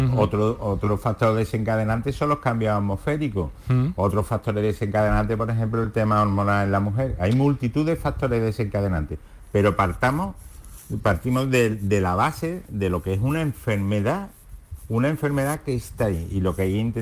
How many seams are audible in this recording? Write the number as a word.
zero